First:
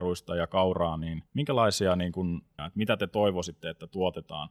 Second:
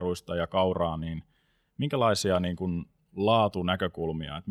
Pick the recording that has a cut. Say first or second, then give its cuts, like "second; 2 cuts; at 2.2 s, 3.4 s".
first; 2 cuts; at 1.3 s, 2.6 s